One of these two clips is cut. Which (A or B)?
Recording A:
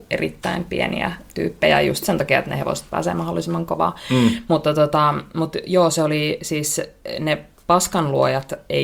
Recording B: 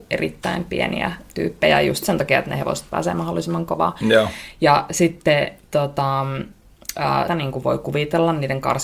B